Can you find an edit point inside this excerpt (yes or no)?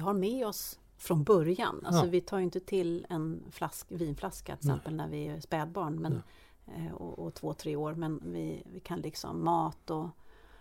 no